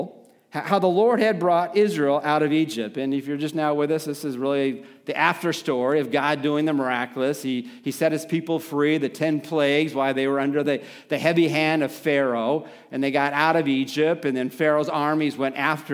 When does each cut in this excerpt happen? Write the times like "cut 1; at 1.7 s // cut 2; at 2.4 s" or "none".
none

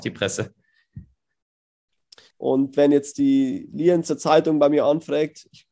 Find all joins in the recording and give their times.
cut 1; at 2.3 s

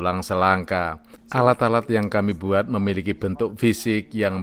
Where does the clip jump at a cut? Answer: cut 1; at 1.2 s

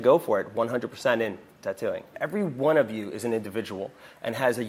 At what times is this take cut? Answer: cut 1; at 2.1 s

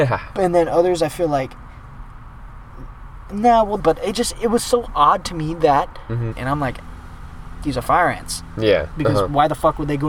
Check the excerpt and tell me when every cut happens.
cut 1; at 3.8 s // cut 2; at 6.3 s // cut 3; at 8.9 s

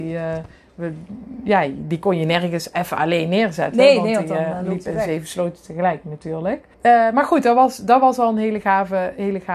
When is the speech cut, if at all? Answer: cut 1; at 6.7 s

